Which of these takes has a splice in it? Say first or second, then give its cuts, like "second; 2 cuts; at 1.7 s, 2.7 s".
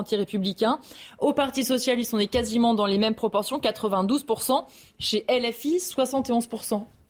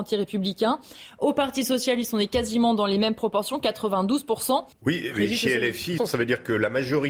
second; 2 cuts; at 4.7 s, 6.0 s